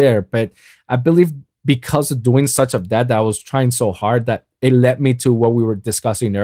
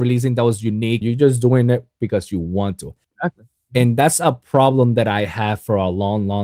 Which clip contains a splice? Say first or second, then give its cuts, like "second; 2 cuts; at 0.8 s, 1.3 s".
second; 2 cuts; at 1.0 s, 3.0 s